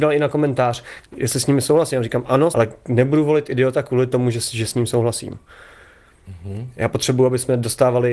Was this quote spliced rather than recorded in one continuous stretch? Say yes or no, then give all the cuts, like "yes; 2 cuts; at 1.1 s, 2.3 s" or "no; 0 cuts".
yes; 2 cuts; at 1.1 s, 2.5 s